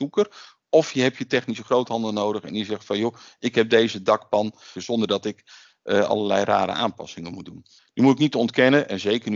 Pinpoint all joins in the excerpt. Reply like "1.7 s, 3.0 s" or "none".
4.8 s, 7.8 s